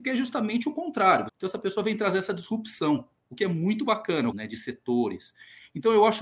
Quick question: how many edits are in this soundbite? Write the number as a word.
two